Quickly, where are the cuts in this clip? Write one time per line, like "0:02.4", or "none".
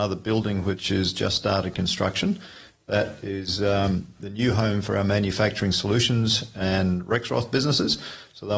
none